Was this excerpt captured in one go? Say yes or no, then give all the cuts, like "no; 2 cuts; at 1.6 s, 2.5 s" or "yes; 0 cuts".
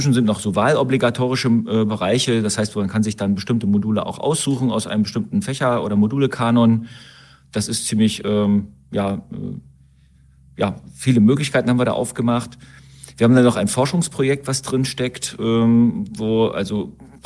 yes; 0 cuts